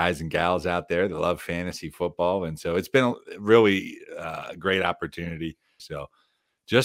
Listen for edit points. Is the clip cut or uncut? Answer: cut